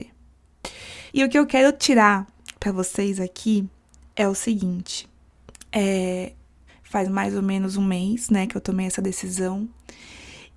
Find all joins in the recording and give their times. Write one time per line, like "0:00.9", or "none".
0:01.1
0:06.7